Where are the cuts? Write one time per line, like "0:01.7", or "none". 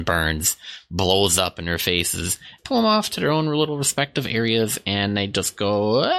0:02.6